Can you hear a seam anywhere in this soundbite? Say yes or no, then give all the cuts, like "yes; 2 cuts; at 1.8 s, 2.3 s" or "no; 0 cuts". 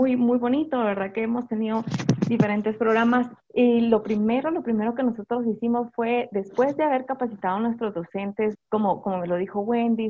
yes; 2 cuts; at 3.4 s, 8.5 s